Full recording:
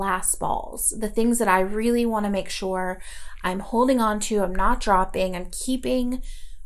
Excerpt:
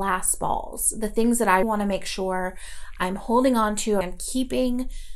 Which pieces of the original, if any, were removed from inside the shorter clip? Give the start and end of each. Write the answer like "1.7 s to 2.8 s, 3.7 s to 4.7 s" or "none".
1.6 s to 2.1 s, 4.4 s to 5.3 s